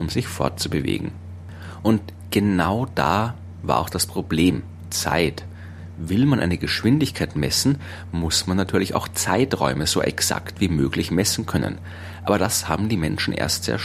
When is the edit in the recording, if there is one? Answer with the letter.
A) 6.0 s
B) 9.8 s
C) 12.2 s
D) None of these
D